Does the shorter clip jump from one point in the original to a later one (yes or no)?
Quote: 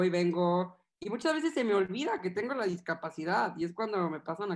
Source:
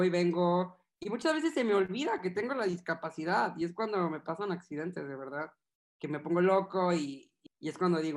no